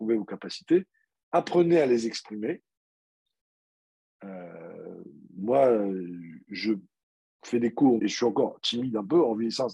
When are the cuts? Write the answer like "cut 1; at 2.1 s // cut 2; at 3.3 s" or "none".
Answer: cut 1; at 8.0 s

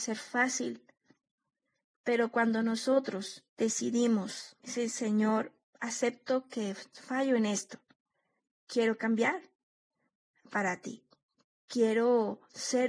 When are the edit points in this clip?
cut 1; at 3.5 s // cut 2; at 4.6 s

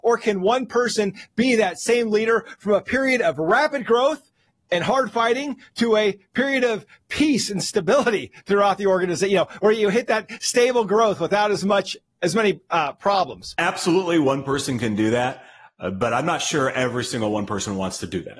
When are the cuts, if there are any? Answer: none

